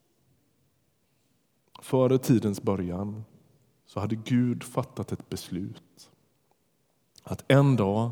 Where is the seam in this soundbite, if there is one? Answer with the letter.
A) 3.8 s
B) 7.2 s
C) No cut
A